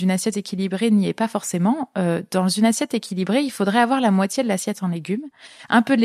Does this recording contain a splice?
no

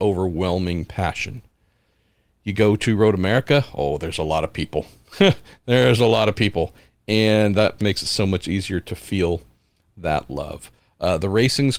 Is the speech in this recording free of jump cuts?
no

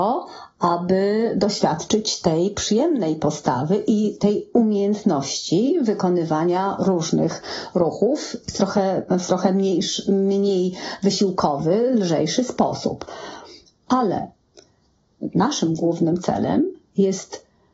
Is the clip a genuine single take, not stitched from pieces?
no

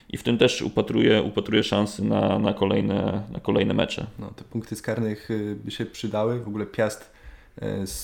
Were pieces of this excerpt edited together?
no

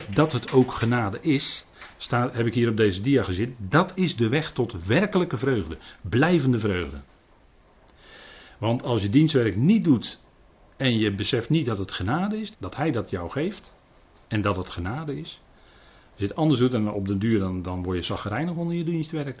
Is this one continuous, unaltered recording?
no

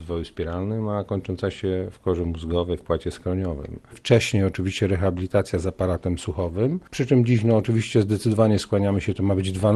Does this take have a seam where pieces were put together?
yes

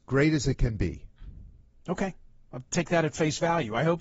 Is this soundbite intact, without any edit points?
yes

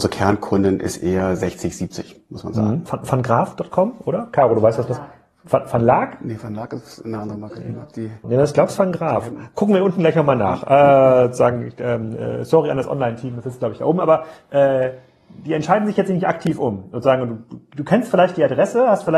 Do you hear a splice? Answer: yes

